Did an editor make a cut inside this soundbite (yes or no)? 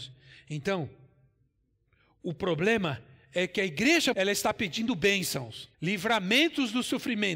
yes